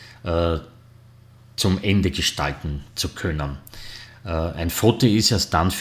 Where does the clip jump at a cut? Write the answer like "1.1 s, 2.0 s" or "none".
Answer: none